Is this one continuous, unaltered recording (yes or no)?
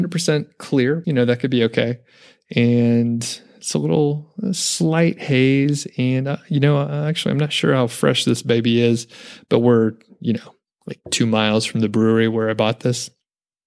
no